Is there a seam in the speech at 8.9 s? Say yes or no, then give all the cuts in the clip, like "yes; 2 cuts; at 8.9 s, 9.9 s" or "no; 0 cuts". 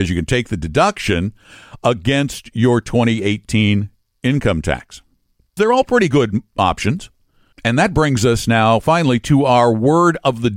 no; 2 cuts; at 5.6 s, 7.5 s